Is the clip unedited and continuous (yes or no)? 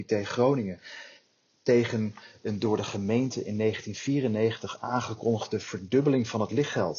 yes